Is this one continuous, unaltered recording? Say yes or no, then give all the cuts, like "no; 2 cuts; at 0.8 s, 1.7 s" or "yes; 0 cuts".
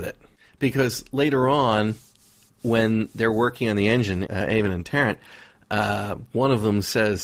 no; 1 cut; at 4.3 s